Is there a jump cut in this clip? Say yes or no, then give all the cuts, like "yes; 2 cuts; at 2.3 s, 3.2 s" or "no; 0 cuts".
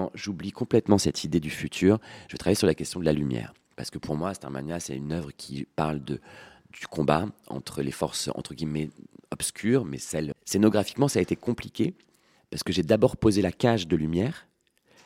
yes; 1 cut; at 10.3 s